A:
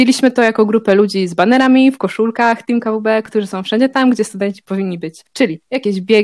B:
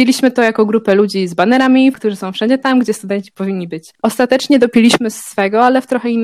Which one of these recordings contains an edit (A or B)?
B